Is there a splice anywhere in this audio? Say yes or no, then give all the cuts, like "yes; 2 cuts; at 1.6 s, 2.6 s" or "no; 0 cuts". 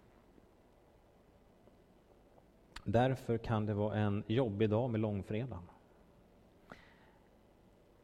no; 0 cuts